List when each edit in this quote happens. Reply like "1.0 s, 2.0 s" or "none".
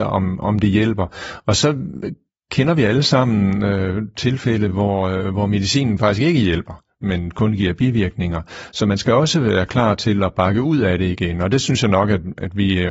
none

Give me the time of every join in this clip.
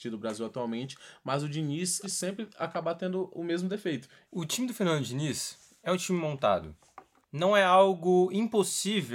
2.0 s, 4.3 s, 7.2 s

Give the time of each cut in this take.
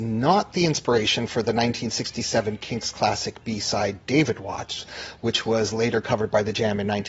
none

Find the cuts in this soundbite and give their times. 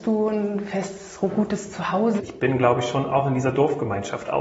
2.2 s

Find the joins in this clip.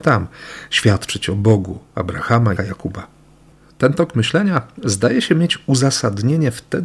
2.6 s

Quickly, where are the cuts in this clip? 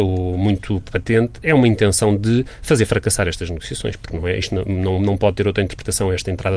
none

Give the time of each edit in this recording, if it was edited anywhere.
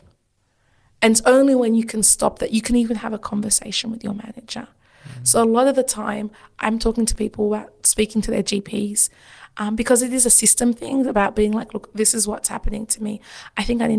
none

